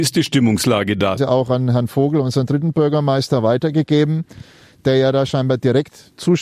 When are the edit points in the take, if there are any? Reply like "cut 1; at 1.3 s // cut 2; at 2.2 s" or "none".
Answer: cut 1; at 1.2 s